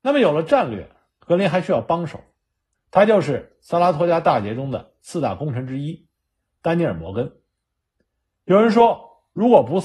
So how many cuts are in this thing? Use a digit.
1